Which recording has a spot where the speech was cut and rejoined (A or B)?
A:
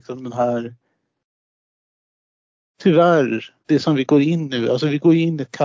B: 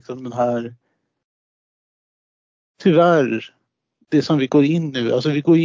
A